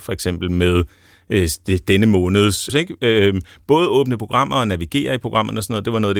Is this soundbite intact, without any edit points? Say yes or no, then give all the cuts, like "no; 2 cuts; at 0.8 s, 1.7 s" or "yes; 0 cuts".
no; 1 cut; at 2.7 s